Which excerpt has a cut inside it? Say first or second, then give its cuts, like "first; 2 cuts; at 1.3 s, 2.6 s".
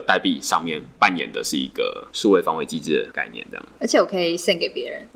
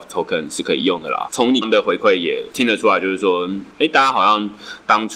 second; 1 cut; at 1.6 s